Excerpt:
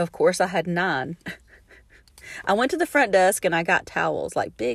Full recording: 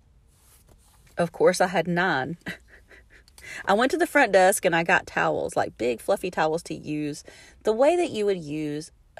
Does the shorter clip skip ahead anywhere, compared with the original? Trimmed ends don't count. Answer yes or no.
no